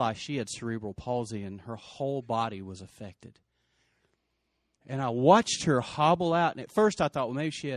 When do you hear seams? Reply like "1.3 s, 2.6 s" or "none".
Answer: 4.8 s